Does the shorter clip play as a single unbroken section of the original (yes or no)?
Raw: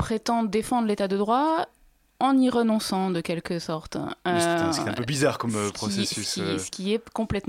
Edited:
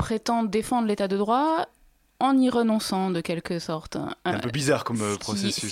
no